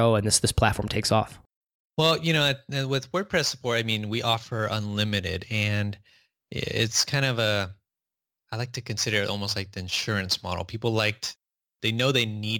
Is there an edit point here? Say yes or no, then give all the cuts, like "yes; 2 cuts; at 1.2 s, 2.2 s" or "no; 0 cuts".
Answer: no; 0 cuts